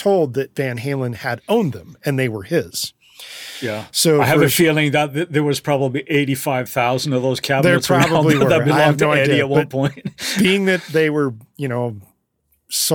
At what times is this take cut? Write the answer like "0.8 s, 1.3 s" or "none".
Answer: none

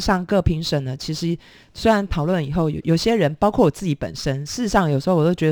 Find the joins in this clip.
2.8 s

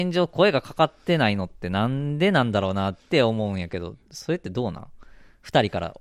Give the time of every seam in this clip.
3.0 s

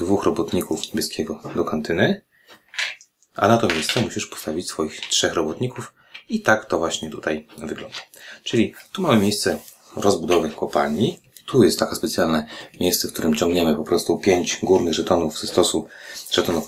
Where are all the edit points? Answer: none

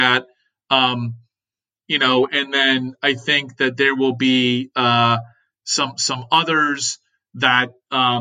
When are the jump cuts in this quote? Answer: none

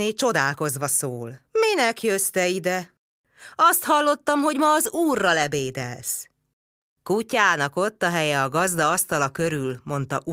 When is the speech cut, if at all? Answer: 1.5 s

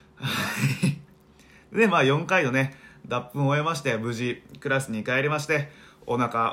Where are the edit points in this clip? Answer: none

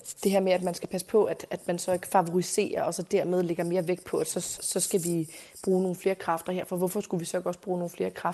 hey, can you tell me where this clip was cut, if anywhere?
4.6 s

